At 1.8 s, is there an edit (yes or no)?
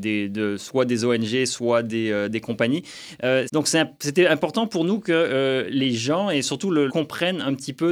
no